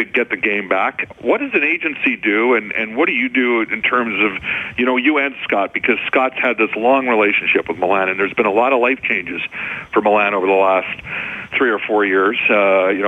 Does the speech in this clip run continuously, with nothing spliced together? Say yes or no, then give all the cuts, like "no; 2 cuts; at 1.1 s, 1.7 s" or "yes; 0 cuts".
yes; 0 cuts